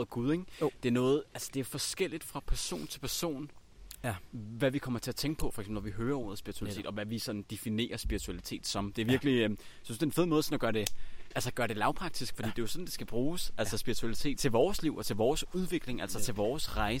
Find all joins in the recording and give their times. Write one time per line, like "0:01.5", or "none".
0:14.4